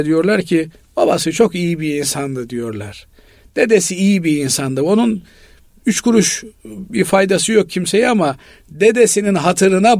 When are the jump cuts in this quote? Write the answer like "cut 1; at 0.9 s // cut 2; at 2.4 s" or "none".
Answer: none